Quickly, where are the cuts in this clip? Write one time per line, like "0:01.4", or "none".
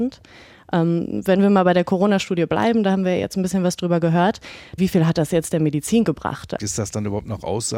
0:04.8
0:06.6